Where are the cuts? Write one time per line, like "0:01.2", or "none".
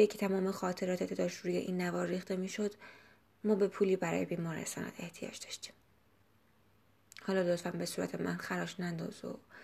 none